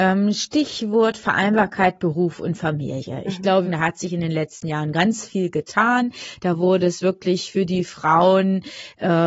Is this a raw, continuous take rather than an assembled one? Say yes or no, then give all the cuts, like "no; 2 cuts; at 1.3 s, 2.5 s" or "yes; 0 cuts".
no; 1 cut; at 3.6 s